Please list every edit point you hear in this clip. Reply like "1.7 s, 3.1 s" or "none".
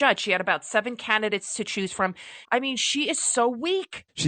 2.5 s